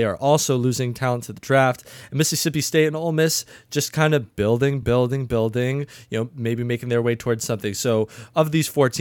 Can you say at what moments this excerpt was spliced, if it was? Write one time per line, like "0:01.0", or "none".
none